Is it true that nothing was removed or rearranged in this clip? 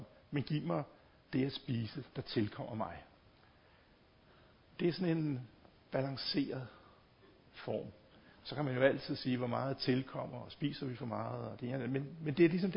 yes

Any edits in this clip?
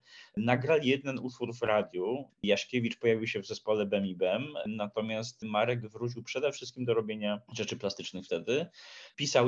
yes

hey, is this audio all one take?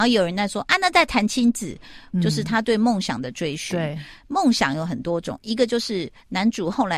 no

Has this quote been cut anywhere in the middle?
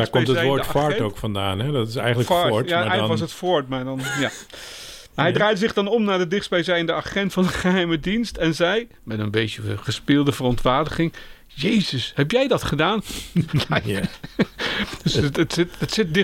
yes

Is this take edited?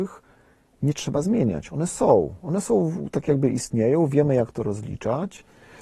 no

